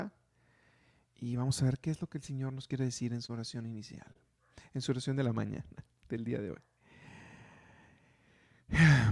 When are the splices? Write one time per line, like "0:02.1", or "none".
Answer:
none